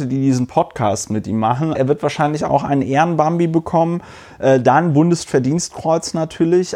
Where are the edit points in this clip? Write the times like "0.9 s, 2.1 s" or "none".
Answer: 1.7 s